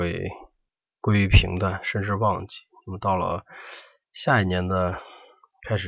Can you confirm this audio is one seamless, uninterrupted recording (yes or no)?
yes